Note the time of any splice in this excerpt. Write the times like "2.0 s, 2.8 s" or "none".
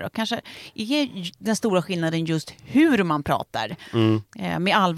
none